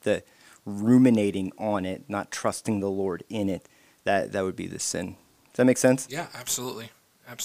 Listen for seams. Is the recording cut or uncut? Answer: uncut